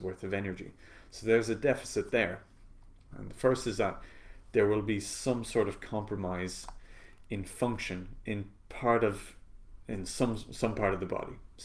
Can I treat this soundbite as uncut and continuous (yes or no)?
no